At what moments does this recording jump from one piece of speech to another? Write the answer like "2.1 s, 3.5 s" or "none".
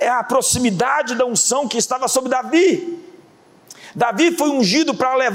none